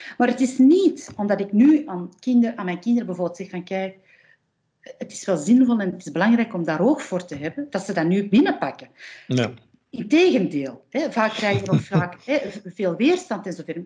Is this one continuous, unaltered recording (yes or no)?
yes